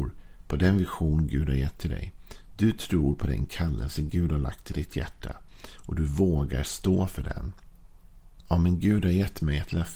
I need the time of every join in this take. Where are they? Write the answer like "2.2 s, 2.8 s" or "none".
8.5 s